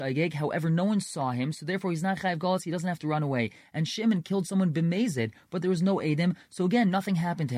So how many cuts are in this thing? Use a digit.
0